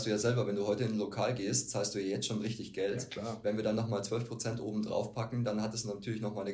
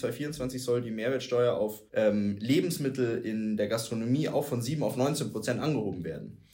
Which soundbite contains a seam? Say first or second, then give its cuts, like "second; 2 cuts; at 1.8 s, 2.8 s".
second; 1 cut; at 1.9 s